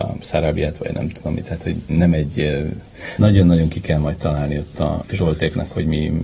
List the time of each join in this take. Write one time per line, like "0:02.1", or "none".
0:01.9
0:03.2